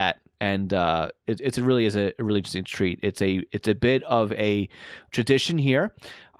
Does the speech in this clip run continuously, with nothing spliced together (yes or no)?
yes